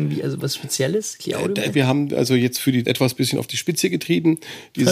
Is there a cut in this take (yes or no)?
yes